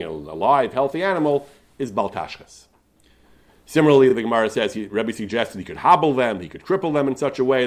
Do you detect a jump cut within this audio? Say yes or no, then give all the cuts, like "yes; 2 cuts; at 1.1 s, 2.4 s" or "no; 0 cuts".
no; 0 cuts